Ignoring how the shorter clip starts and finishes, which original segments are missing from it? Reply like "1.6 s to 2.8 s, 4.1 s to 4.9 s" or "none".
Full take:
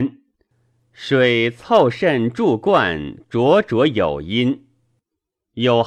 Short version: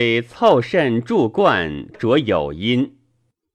3.2 s to 3.6 s

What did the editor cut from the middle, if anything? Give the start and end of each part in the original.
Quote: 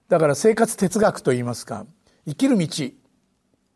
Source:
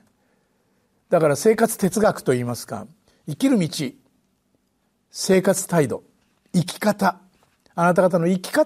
none

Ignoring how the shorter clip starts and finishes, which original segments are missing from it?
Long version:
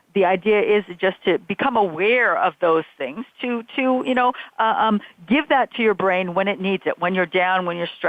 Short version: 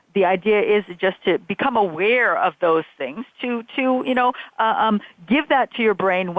none

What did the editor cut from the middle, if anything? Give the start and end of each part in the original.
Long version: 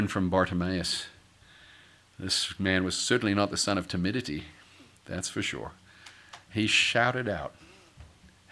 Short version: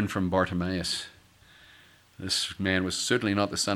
none

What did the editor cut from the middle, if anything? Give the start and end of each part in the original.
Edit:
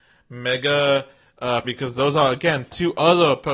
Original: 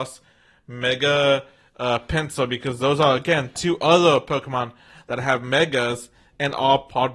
2.0 s to 2.5 s

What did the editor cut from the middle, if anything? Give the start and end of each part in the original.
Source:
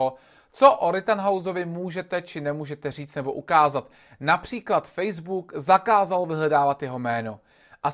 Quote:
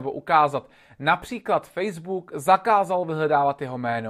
none

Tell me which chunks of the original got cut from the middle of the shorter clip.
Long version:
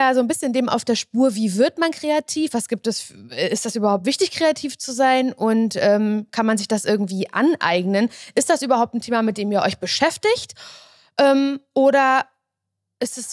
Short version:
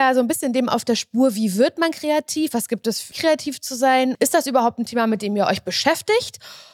3.1 s to 4.3 s, 5.3 s to 8.3 s

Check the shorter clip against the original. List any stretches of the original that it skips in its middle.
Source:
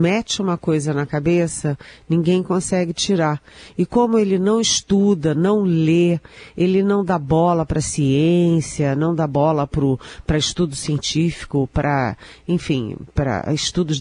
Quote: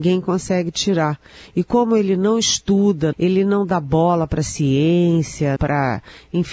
5.3 s to 6.5 s, 8.9 s to 11.7 s

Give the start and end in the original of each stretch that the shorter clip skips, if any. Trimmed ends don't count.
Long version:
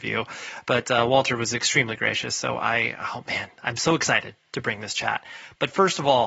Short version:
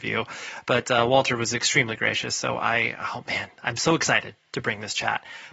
none

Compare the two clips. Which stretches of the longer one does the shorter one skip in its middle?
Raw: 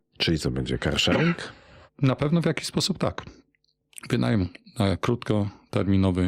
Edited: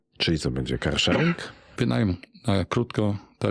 1.8 s to 4.1 s

